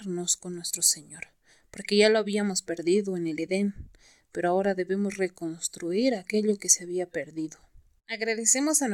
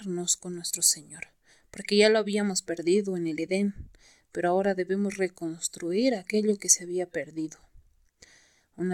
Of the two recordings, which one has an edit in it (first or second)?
first